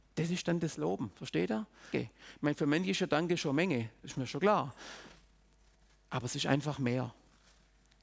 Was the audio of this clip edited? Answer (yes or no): yes